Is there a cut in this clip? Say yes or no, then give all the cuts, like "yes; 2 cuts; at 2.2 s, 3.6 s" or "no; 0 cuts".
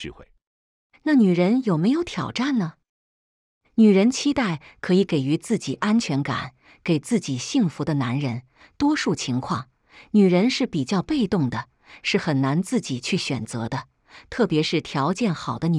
no; 0 cuts